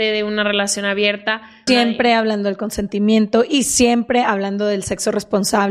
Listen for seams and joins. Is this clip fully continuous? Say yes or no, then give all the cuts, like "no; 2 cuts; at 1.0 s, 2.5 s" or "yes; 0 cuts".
no; 1 cut; at 1.7 s